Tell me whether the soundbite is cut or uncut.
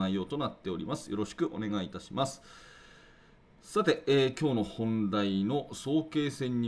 uncut